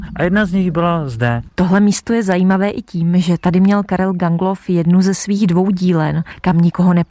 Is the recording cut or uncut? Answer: uncut